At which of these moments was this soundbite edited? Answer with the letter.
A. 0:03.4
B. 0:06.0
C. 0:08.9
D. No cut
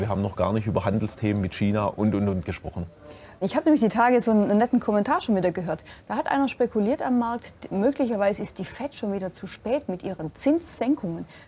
A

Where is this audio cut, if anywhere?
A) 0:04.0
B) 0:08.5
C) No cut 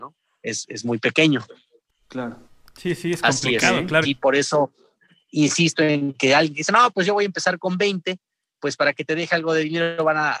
A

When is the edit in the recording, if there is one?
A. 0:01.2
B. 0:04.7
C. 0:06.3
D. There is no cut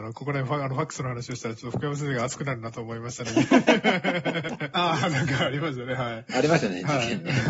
B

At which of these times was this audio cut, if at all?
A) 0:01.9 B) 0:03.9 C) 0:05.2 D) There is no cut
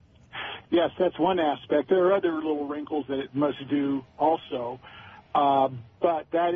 D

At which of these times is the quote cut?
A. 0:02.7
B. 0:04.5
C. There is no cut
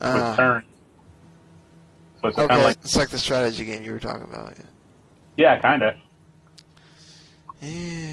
A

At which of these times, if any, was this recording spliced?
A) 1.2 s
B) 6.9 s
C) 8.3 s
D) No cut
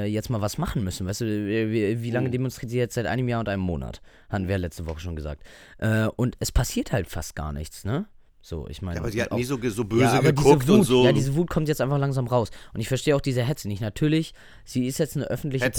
C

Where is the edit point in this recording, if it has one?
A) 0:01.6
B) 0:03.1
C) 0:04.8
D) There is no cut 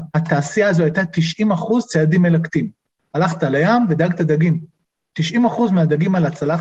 D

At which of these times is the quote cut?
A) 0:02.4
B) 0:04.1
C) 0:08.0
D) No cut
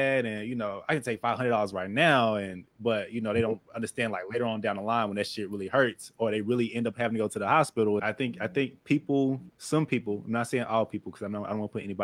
C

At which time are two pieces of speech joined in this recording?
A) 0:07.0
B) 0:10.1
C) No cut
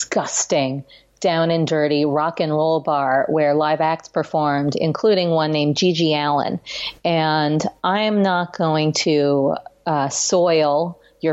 C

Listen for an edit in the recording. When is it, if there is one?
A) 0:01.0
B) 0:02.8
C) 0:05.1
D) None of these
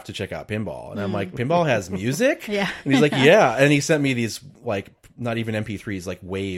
D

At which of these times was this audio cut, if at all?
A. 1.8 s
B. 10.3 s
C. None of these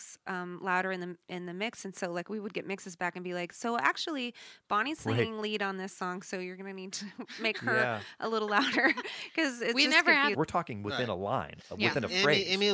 B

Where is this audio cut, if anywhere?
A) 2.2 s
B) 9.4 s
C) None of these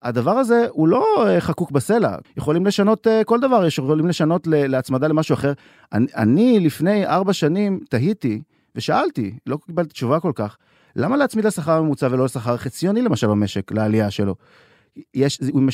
A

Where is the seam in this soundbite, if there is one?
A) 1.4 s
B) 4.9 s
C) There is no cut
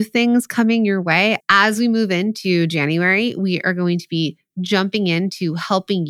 A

